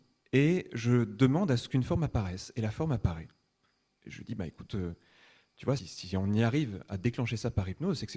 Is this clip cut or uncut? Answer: cut